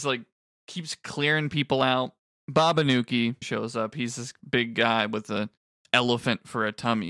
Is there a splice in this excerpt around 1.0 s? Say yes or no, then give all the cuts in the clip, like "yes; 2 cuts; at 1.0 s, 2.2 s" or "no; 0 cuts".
no; 1 cut; at 3.4 s